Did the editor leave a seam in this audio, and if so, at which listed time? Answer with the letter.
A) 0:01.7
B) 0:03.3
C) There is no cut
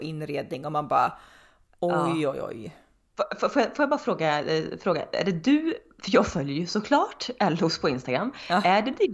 C